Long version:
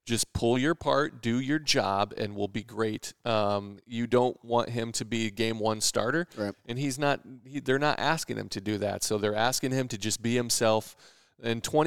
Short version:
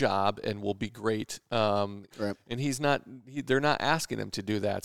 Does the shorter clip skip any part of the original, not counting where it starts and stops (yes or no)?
yes